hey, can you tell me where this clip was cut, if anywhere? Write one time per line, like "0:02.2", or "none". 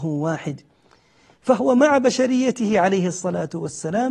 none